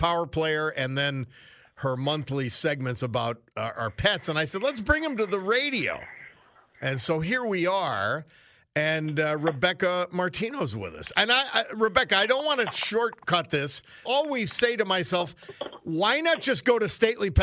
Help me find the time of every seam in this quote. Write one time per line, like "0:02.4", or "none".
0:14.1

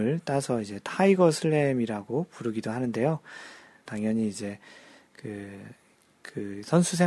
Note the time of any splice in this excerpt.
0:03.8

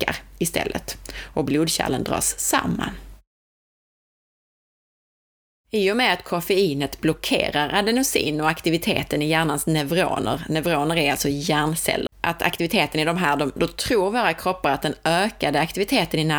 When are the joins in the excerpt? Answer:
0:12.1
0:13.6

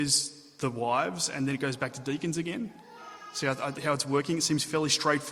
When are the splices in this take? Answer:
0:03.7

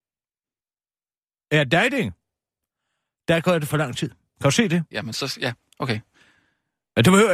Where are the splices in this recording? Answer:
0:04.9

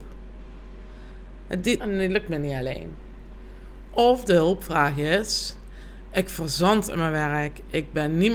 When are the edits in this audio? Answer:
0:01.8

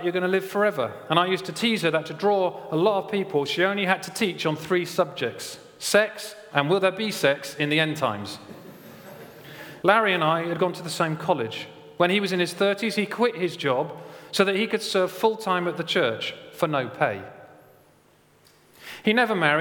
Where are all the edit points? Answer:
0:06.5
0:09.8

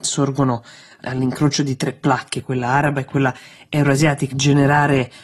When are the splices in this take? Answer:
0:02.4
0:04.3

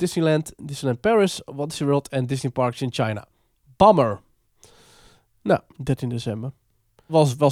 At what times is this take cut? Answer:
0:05.7

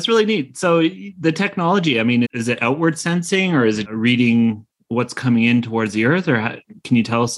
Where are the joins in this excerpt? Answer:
0:02.2
0:03.8

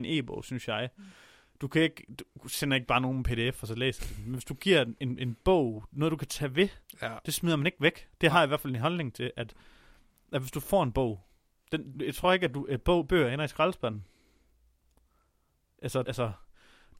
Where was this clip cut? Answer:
0:11.9
0:16.0

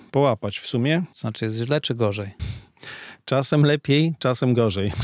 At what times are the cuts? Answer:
0:01.1
0:02.4

